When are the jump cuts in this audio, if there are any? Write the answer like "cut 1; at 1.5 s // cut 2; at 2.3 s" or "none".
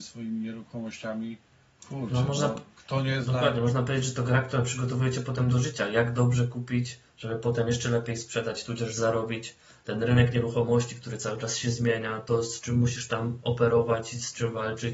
cut 1; at 1.8 s